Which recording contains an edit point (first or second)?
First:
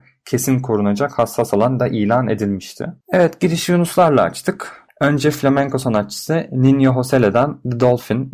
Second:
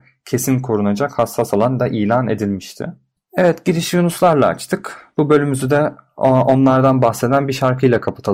first